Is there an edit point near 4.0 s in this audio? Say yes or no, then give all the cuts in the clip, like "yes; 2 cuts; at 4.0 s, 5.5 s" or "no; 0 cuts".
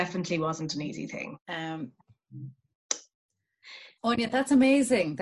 yes; 2 cuts; at 1.4 s, 4.0 s